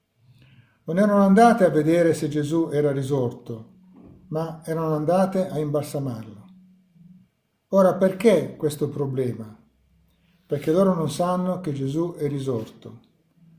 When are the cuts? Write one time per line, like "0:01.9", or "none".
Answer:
none